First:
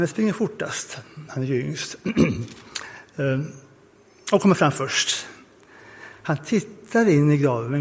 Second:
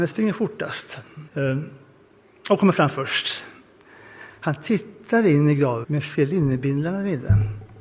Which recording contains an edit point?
second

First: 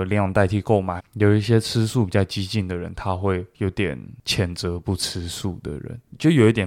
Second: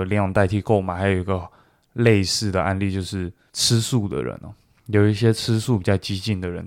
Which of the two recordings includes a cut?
first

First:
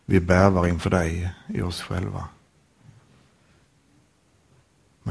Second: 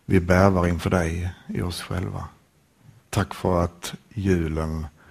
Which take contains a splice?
second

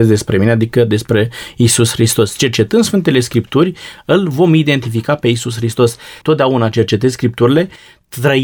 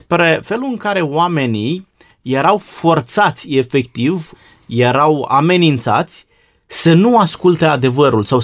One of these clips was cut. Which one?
first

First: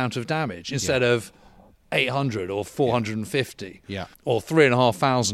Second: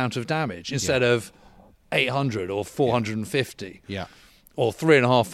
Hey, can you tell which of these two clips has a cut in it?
first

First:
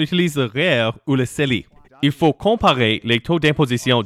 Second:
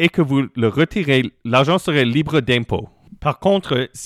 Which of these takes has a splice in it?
first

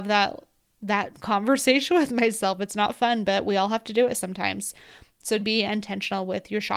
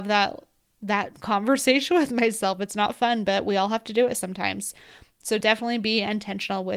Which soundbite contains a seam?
first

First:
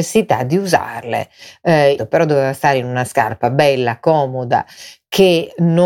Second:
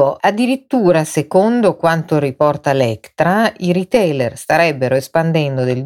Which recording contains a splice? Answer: first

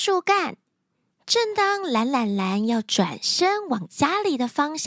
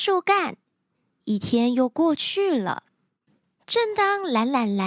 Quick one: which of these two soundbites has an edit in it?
first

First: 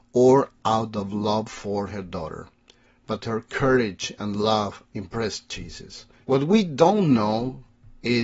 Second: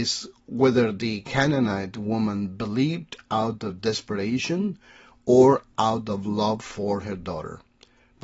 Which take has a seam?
first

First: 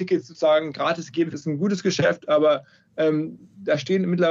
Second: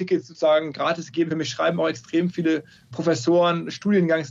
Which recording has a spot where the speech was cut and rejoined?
first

